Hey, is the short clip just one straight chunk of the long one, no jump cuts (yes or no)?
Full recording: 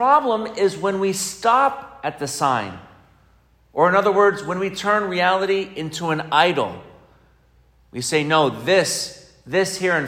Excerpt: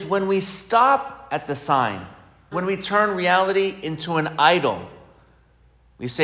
no